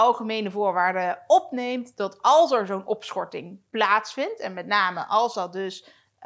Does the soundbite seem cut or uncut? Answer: uncut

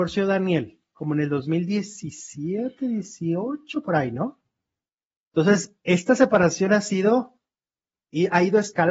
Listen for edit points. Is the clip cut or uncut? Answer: uncut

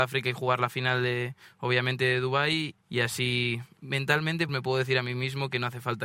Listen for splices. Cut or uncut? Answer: cut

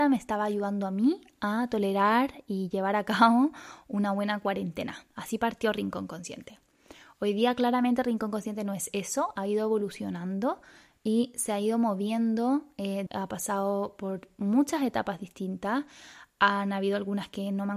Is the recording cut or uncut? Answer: cut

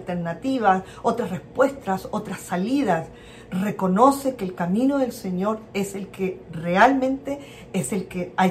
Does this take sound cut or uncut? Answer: uncut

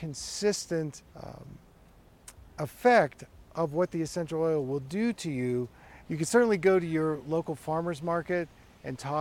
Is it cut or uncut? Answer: cut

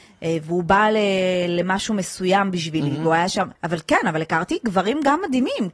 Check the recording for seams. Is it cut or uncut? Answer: cut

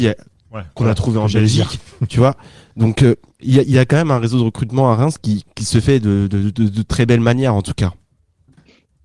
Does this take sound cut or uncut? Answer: cut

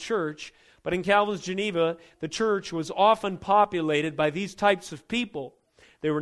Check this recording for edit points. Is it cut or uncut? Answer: uncut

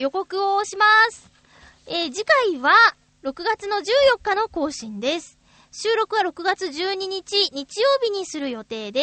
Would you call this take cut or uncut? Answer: uncut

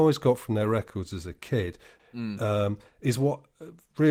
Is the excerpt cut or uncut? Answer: cut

